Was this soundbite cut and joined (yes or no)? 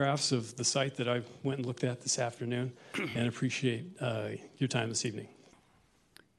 no